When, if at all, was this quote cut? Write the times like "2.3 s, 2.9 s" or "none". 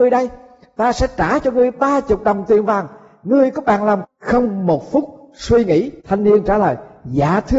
4.0 s, 6.0 s

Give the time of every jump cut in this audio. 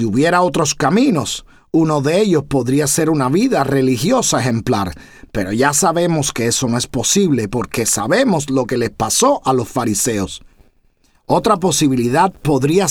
none

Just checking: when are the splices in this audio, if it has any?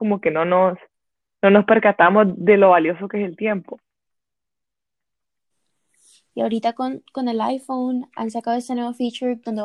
6.3 s

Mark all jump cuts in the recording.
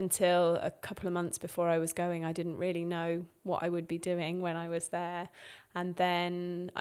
none

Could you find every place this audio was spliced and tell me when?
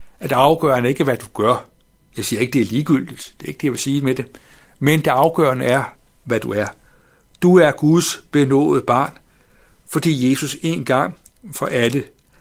none

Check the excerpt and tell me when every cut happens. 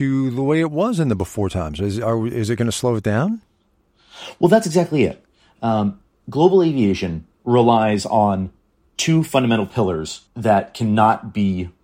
7.3 s, 10.3 s

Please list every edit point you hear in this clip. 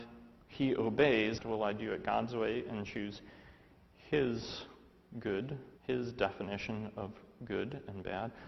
1.4 s, 5.8 s

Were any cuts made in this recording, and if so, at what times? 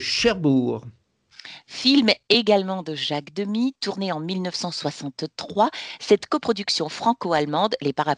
none

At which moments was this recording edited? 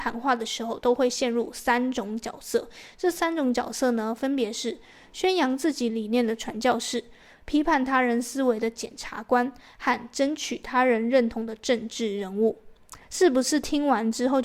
none

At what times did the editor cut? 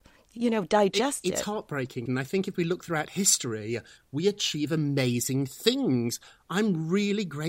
2.1 s, 4.0 s

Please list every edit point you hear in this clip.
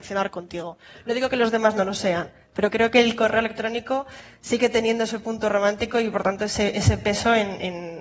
none

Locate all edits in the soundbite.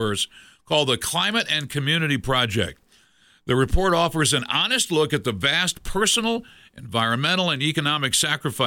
none

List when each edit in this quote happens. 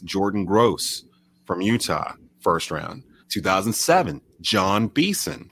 3.2 s

